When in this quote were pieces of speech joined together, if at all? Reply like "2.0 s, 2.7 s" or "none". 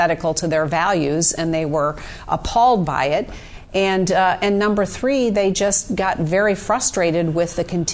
none

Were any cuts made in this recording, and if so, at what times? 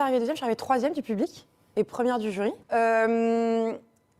2.6 s

